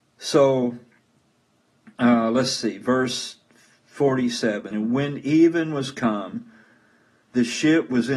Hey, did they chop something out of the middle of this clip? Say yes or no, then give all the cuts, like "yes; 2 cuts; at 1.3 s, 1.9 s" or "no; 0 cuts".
yes; 1 cut; at 4.7 s